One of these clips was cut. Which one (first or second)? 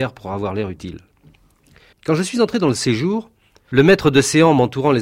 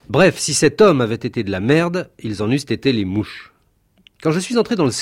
first